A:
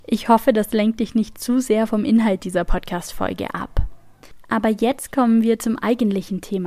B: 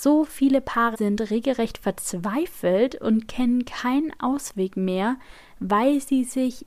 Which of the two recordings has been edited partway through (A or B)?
B